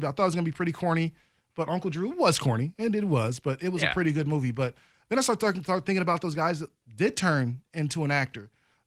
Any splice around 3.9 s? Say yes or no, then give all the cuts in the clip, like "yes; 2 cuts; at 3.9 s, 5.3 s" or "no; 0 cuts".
no; 0 cuts